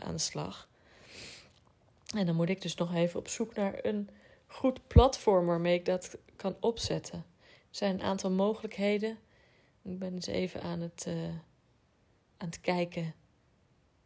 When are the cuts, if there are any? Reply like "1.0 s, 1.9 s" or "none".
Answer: none